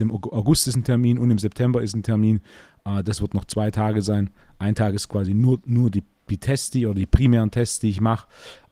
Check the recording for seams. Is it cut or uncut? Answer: uncut